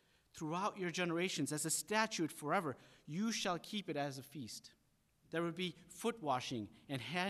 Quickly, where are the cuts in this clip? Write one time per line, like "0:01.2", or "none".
0:05.2